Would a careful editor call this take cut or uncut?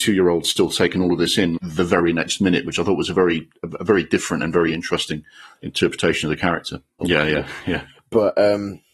cut